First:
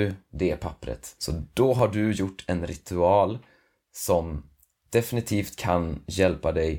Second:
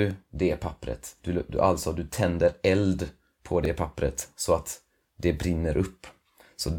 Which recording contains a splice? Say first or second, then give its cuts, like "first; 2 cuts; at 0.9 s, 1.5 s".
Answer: first; 1 cut; at 1.2 s